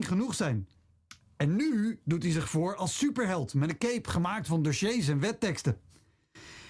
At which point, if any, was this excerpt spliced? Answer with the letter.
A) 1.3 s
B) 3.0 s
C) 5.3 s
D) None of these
D